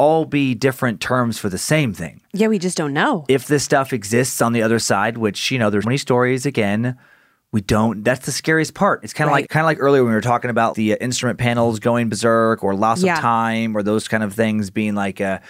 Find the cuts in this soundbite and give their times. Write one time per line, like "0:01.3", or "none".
0:05.8
0:09.4
0:10.7